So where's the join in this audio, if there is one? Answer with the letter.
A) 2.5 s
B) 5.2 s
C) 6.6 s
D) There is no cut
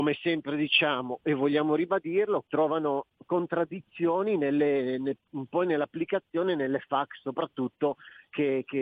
A